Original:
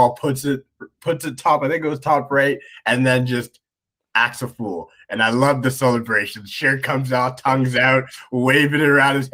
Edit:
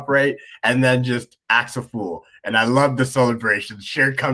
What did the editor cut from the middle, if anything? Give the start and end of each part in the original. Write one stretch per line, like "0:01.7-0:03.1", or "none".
0:03.7-0:04.1